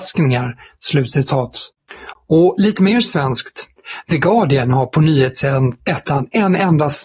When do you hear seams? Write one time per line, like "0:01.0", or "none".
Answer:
0:02.1

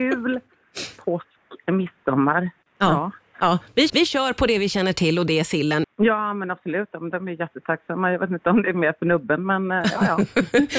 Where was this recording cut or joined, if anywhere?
0:03.9
0:05.8

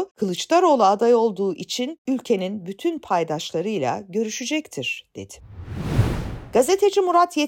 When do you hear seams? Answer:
none

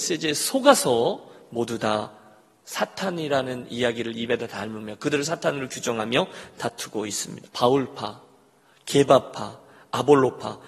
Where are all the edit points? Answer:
0:07.5

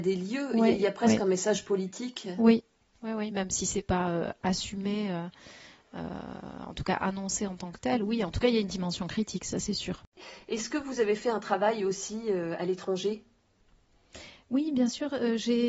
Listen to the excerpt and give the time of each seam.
none

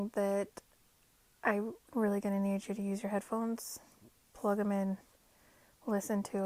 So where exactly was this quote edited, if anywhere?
none

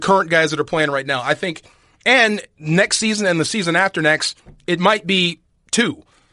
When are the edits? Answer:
none

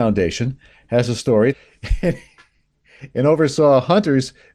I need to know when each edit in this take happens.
0:01.5

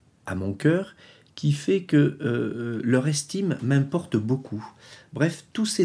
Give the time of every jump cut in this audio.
none

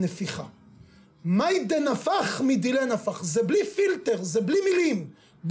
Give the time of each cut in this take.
none

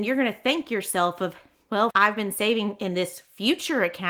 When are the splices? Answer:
0:01.9

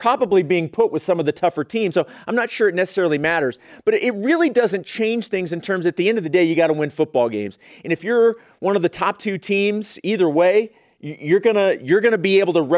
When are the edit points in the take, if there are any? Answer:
none

